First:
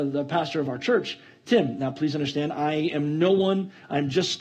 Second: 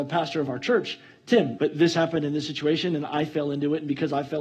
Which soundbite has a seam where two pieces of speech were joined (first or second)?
second